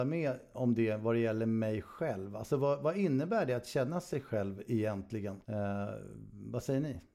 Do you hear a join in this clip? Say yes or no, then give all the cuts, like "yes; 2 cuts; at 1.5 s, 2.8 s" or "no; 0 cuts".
yes; 1 cut; at 5.4 s